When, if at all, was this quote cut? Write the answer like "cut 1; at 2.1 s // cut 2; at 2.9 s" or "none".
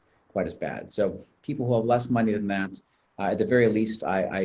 none